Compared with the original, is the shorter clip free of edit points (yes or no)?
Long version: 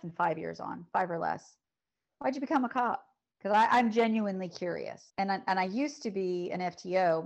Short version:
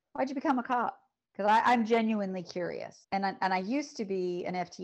yes